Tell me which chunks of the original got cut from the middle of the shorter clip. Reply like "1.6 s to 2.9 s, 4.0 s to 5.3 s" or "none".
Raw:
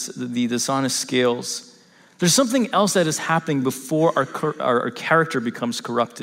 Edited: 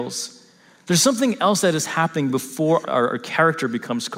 4.1 s to 4.5 s